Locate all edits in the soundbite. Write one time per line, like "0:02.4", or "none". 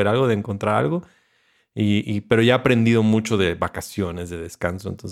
0:02.0